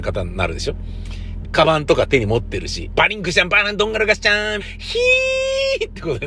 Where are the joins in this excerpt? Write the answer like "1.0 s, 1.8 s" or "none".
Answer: 1.4 s, 3.0 s, 4.6 s